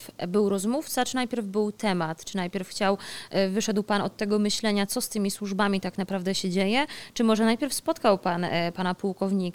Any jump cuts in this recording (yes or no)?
no